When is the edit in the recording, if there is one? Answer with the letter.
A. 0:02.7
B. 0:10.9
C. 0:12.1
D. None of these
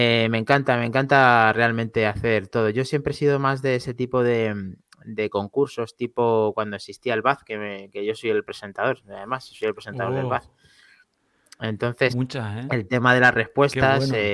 C